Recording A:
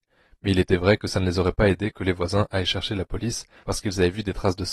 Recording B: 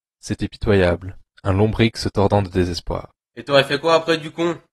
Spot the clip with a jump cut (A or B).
B